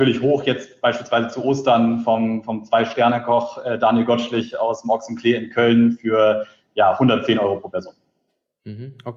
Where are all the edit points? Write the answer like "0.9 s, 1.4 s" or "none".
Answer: none